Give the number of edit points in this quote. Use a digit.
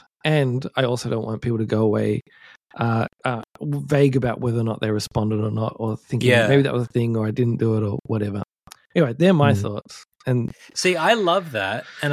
1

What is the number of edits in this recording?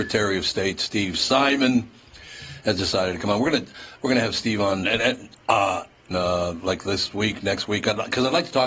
1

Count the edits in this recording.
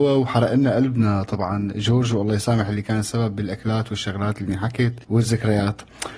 1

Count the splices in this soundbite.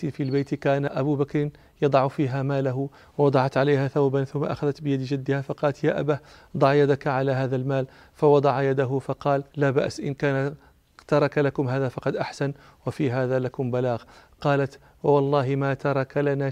1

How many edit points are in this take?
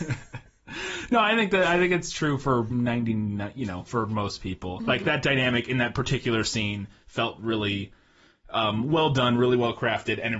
1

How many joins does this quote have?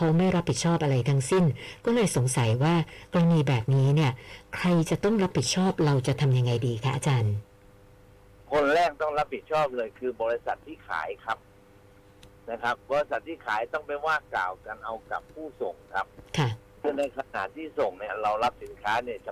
1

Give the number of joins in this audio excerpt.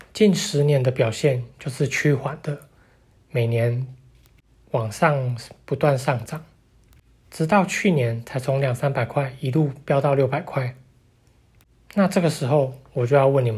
0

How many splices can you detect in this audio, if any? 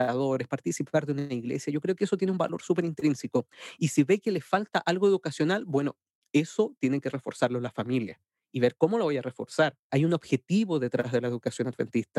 1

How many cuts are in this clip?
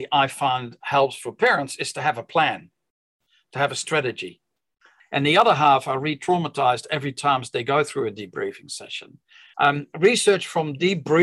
2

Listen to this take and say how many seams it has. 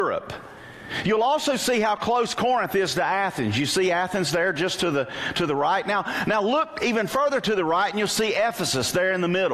0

